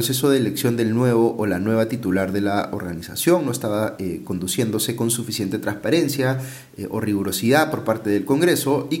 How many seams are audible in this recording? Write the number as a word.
zero